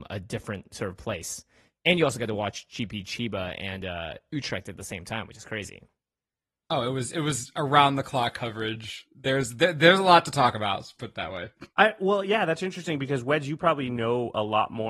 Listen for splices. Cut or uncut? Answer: uncut